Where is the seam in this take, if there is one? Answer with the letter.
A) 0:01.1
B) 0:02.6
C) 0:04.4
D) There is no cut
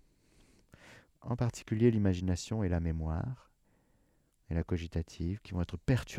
A